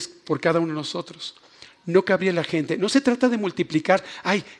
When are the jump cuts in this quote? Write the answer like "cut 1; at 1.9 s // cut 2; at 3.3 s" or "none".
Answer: none